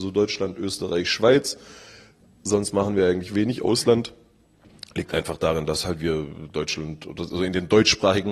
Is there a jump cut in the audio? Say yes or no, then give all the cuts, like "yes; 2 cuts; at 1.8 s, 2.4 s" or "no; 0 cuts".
no; 0 cuts